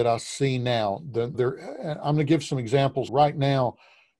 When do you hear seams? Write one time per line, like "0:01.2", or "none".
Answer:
0:01.3
0:03.1